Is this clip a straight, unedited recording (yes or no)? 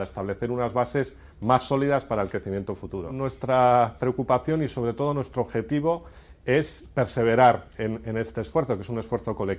yes